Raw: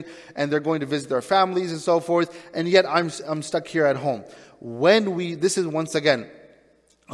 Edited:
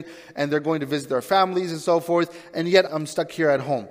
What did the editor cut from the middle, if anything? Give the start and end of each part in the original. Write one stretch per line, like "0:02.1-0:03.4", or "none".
0:02.9-0:03.2